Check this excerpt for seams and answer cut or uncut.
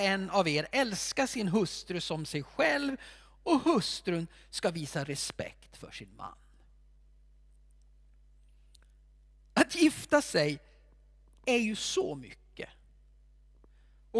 uncut